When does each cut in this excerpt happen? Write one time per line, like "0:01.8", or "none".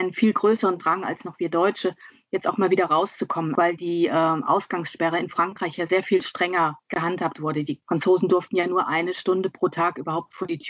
0:03.5